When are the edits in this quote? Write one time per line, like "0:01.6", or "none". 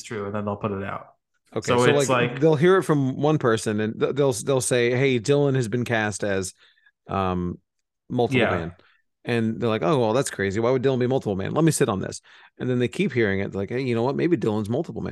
none